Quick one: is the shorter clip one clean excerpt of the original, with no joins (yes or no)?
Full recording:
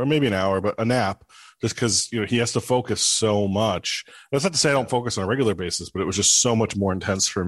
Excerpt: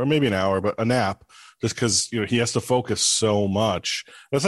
yes